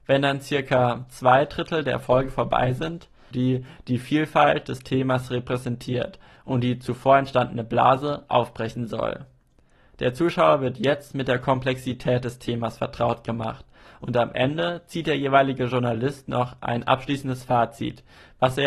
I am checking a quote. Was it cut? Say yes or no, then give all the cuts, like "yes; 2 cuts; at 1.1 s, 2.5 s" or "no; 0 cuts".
yes; 1 cut; at 3.3 s